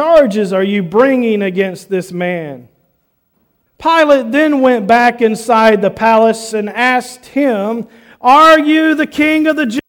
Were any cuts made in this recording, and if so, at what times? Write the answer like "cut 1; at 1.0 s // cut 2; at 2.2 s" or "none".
cut 1; at 3.7 s // cut 2; at 6.5 s